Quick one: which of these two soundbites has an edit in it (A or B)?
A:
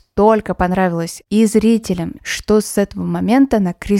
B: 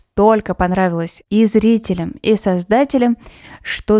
A